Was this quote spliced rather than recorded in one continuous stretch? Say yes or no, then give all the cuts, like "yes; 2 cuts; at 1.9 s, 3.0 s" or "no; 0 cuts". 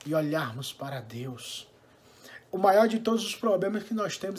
no; 0 cuts